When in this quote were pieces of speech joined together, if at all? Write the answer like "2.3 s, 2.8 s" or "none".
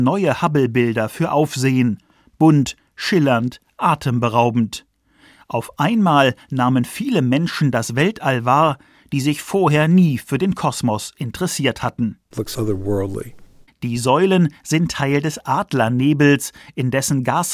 12.3 s, 13.7 s